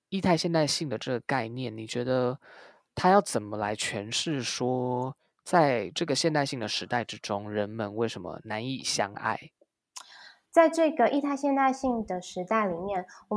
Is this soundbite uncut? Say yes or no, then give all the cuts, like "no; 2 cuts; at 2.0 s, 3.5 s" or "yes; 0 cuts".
no; 1 cut; at 10.5 s